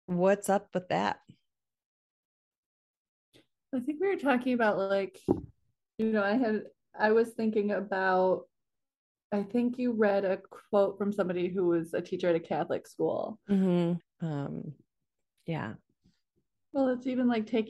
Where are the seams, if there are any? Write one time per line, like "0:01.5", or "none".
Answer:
0:14.0